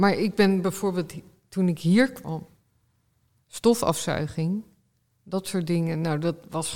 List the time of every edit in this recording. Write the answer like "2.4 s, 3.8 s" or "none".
3.4 s